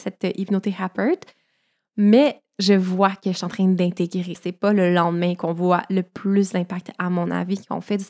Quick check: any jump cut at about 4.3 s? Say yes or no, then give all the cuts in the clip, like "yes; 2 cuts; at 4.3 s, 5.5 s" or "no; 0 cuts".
yes; 1 cut; at 4.3 s